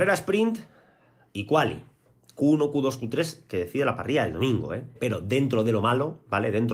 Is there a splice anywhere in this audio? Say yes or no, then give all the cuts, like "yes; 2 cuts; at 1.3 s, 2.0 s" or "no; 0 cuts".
yes; 1 cut; at 5.0 s